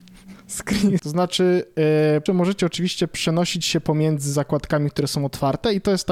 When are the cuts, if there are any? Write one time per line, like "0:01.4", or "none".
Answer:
0:01.0
0:02.3